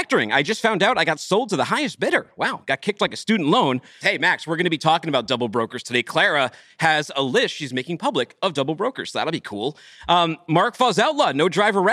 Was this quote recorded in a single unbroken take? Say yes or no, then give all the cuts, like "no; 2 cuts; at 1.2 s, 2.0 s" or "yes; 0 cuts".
no; 1 cut; at 4.0 s